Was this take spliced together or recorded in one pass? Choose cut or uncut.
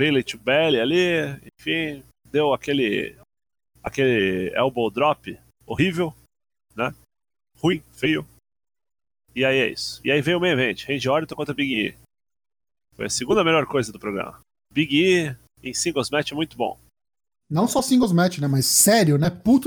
uncut